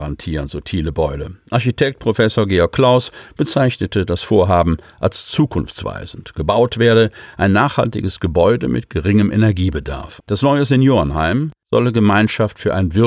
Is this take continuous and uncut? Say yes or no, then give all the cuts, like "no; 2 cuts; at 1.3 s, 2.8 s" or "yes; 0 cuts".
no; 1 cut; at 10.2 s